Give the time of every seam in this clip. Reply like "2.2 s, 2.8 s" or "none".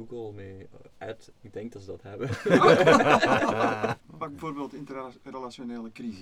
1.3 s, 4.0 s